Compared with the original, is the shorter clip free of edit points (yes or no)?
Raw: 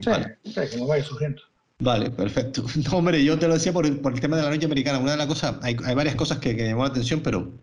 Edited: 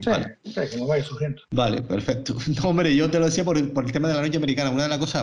no